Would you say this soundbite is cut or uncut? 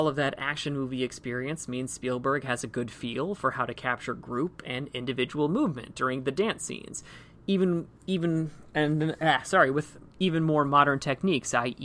uncut